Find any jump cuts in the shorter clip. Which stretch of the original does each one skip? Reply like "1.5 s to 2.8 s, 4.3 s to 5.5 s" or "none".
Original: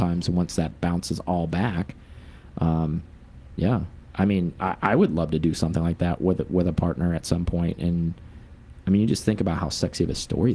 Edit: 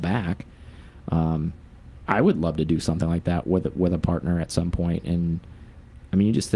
3.6 s to 4.8 s